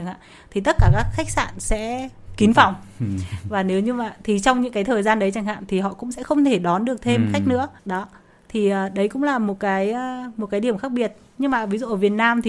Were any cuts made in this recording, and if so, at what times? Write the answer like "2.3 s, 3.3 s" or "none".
7.8 s